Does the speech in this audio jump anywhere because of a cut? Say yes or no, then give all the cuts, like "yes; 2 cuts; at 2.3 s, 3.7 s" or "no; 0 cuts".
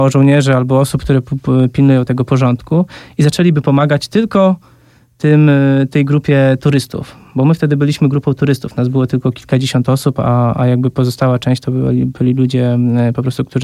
no; 0 cuts